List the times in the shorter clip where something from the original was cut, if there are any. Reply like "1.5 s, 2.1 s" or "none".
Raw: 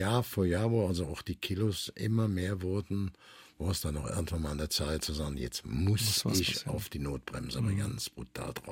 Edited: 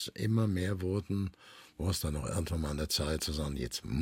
none